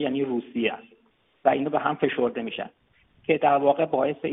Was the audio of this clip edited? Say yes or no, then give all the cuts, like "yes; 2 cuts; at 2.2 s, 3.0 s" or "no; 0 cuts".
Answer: no; 0 cuts